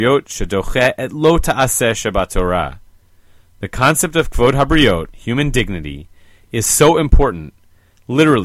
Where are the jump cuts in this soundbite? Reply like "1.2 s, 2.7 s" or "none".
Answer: none